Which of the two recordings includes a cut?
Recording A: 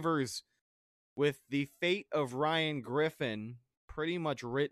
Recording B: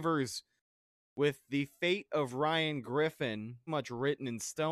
B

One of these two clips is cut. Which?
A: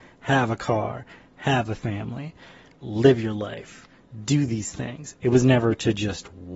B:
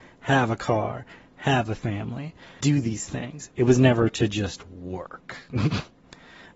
B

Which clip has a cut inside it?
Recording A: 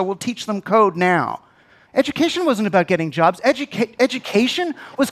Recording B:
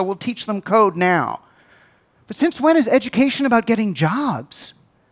A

